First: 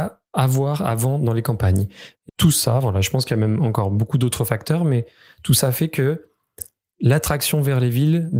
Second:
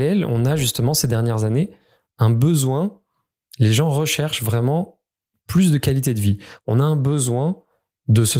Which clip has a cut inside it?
first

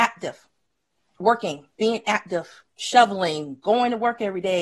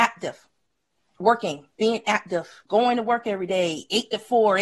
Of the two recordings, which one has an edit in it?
second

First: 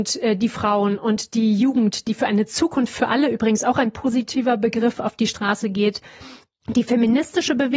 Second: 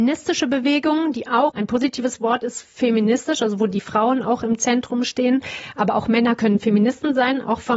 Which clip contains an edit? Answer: second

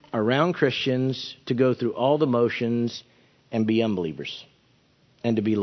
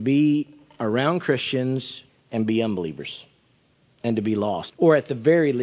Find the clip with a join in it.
second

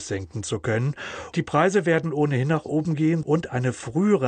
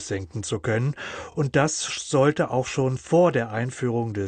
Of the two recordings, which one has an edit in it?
first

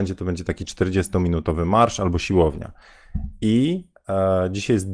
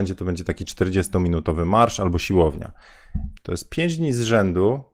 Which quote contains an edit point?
second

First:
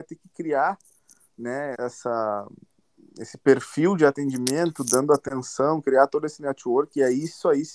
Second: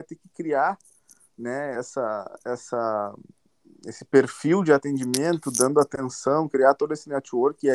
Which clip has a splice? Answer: first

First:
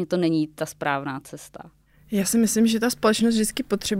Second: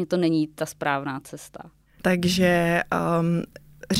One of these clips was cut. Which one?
second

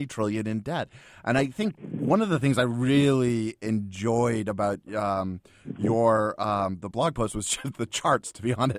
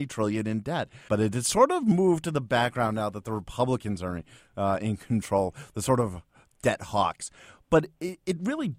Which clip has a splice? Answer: second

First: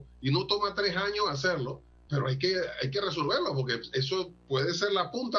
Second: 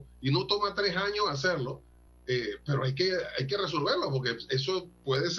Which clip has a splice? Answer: first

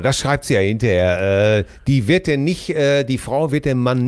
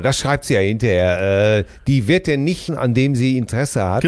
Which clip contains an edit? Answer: second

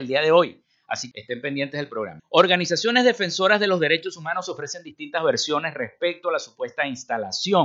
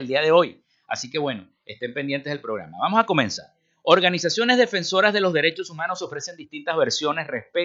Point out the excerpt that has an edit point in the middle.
first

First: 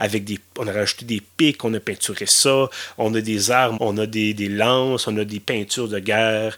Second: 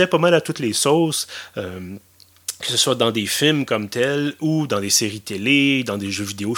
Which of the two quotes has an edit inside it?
first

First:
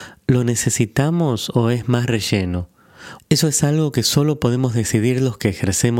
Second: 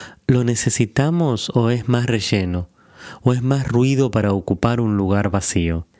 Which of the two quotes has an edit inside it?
first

